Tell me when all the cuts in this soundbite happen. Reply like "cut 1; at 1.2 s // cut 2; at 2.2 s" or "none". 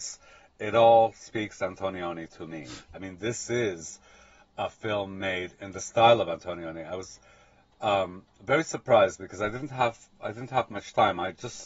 cut 1; at 2.9 s